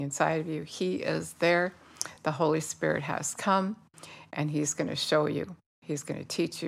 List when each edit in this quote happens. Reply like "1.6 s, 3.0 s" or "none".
none